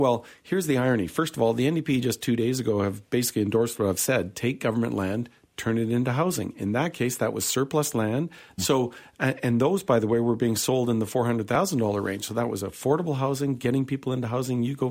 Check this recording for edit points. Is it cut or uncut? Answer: cut